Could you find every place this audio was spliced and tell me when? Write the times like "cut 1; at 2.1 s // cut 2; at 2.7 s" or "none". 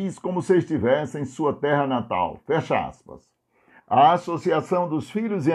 cut 1; at 3.8 s

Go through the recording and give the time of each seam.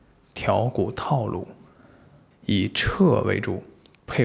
cut 1; at 2.3 s

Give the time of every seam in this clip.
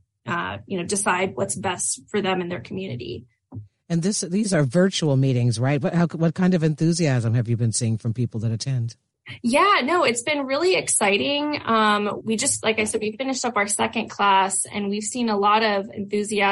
cut 1; at 12.2 s

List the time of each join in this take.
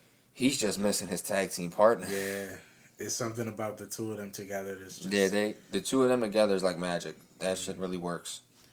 none

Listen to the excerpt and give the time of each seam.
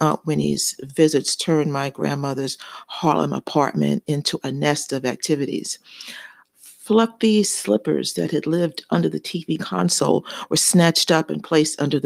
none

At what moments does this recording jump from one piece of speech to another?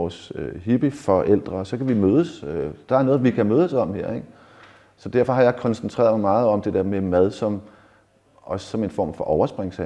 none

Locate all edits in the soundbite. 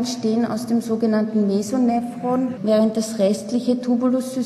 cut 1; at 2.6 s

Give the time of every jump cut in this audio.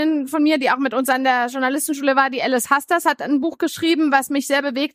none

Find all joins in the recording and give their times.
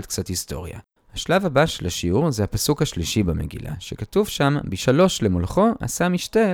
cut 1; at 1.0 s

